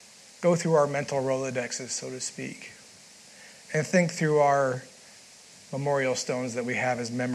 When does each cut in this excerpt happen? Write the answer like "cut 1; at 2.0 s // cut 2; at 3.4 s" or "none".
none